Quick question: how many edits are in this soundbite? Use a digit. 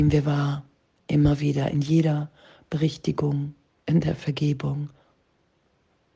1